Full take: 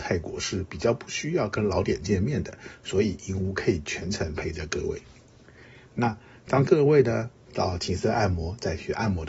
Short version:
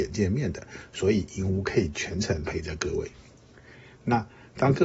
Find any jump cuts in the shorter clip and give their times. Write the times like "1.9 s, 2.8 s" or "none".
none